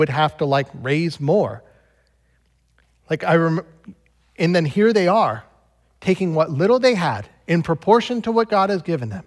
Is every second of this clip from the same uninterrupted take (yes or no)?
yes